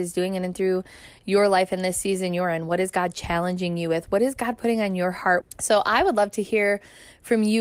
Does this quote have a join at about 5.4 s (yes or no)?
yes